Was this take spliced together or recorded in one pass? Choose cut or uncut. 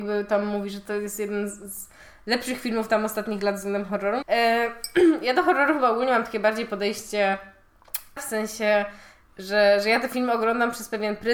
cut